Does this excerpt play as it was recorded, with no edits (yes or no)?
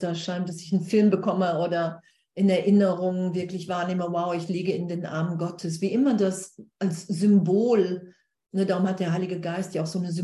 yes